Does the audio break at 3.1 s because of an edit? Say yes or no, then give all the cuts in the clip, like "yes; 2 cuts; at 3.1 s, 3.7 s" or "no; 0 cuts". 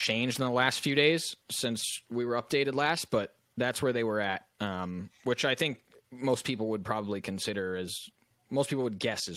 no; 0 cuts